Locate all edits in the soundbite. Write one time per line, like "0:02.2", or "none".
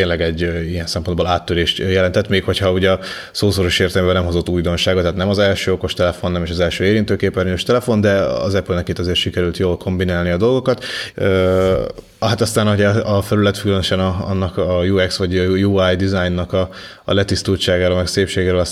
0:11.1